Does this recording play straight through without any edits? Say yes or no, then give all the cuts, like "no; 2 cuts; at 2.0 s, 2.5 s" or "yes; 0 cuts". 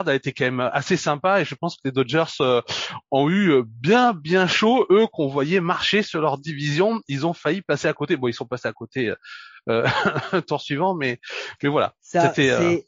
yes; 0 cuts